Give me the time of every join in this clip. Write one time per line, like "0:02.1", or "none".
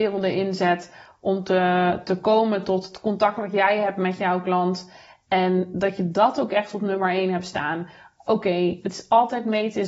none